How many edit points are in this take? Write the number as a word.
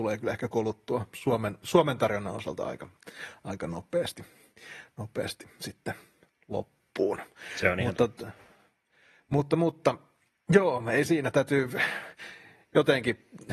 zero